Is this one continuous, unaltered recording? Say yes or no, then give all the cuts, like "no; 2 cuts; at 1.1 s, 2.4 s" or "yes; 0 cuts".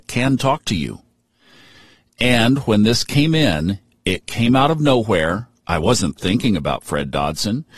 yes; 0 cuts